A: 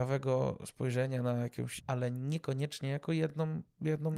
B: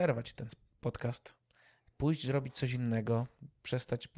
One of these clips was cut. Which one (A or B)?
A